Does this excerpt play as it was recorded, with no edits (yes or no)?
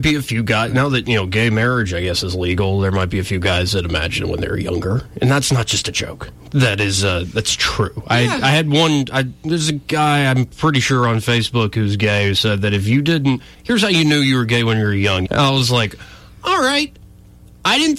no